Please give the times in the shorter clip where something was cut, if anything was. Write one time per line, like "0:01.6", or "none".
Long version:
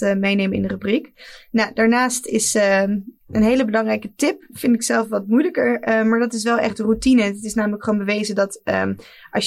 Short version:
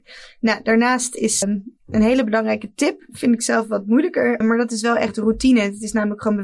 0:01.4
0:04.4